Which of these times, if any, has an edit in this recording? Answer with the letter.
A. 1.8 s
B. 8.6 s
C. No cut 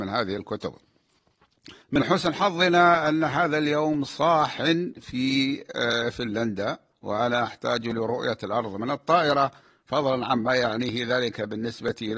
A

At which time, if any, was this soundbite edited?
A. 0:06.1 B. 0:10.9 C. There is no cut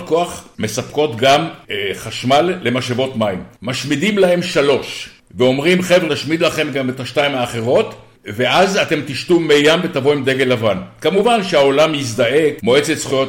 A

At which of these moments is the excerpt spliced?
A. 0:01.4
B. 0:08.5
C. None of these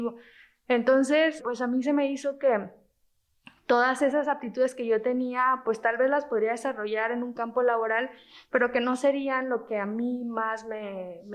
A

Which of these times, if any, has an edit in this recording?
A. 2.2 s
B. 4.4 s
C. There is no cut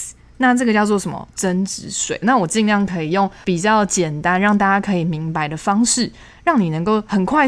A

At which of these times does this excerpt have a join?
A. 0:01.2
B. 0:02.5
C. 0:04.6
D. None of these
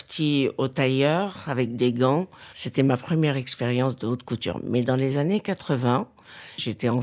B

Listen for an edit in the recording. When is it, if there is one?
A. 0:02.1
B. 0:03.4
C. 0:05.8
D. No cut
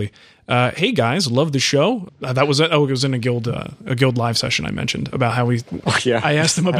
A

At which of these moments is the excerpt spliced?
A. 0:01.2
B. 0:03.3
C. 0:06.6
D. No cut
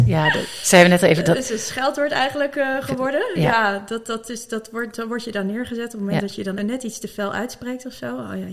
C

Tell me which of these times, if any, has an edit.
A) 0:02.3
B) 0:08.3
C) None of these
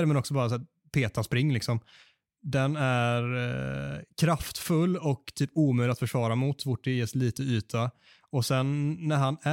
C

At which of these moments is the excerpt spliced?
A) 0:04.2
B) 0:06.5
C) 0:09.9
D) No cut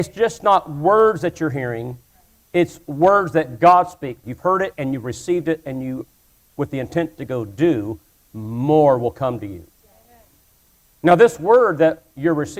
A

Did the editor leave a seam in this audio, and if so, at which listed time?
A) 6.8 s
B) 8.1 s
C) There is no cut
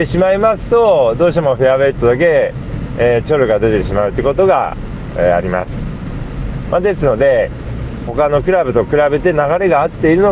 B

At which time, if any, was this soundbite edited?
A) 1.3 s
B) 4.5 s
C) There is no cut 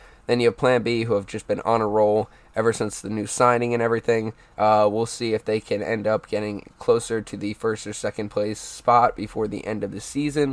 B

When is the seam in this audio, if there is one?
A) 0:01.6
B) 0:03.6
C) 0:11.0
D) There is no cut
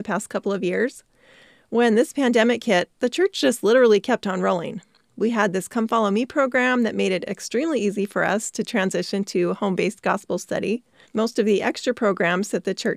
C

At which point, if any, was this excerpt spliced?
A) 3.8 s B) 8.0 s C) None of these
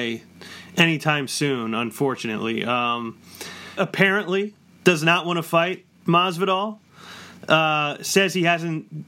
A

